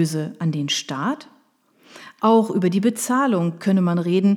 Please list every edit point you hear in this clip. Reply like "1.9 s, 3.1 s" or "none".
2.2 s